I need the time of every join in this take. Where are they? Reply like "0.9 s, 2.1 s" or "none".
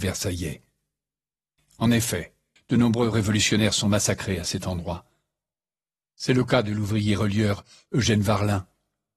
2.6 s

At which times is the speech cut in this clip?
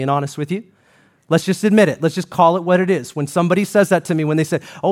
none

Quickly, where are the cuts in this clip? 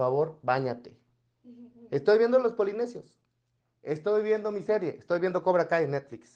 3.6 s

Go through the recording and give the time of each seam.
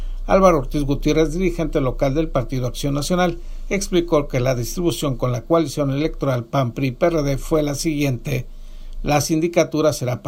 9.0 s

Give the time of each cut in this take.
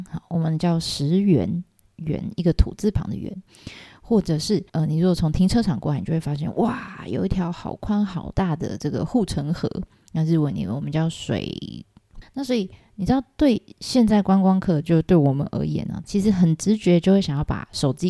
4.7 s, 12.2 s, 16.0 s

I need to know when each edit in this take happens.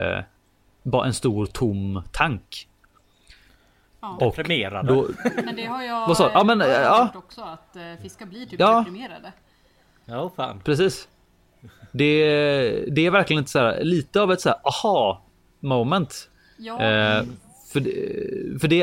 none

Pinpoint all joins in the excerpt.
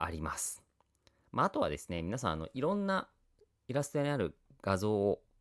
none

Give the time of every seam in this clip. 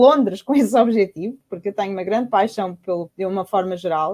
3.1 s

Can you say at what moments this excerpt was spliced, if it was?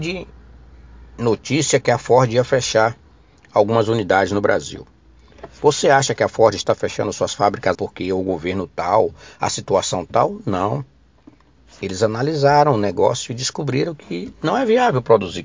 7.7 s

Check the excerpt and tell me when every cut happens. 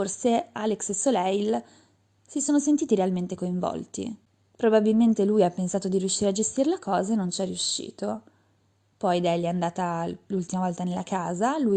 none

